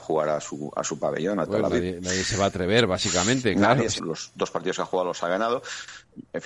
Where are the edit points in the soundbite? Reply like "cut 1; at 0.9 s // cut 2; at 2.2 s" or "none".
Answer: cut 1; at 4.0 s